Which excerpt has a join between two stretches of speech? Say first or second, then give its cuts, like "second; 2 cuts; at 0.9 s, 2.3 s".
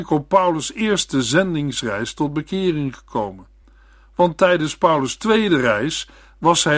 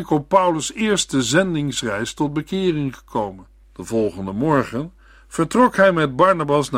second; 1 cut; at 3.6 s